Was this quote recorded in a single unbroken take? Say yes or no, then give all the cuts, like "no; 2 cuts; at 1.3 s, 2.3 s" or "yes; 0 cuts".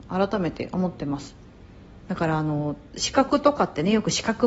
no; 1 cut; at 2.1 s